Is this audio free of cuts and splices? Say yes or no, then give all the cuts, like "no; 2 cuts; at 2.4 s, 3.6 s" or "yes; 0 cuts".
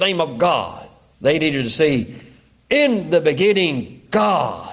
no; 1 cut; at 1.1 s